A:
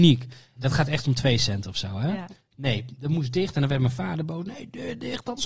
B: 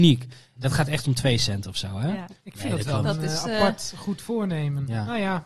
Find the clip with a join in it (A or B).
B